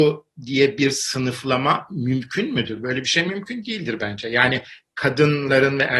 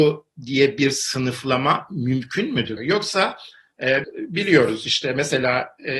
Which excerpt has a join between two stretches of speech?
second; 2 cuts; at 2.8 s, 4.0 s

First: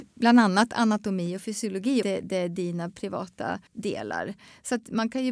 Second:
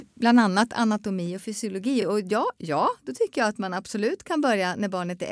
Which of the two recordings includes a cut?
first; 2 cuts; at 2.0 s, 3.7 s

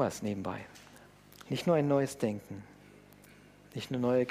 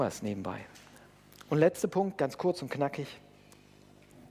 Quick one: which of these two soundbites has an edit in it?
first; 1 cut; at 1.4 s

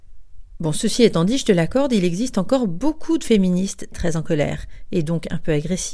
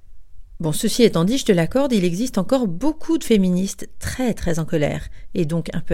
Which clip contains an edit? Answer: first; 1 cut; at 3.9 s

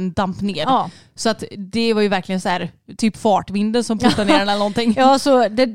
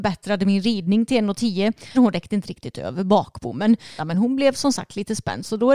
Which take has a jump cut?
second; 2 cuts; at 1.9 s, 4.0 s

